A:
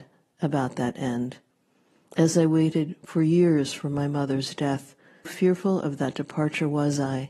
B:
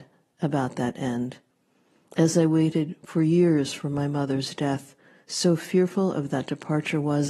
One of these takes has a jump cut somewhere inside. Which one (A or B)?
A